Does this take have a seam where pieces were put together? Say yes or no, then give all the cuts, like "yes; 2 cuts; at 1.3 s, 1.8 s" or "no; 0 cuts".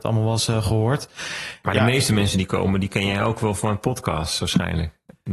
no; 0 cuts